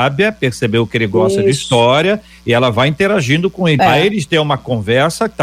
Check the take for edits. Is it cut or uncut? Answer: cut